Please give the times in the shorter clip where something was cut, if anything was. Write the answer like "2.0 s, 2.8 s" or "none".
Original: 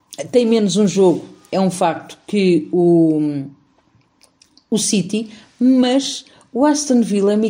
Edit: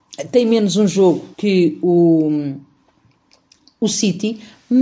1.3 s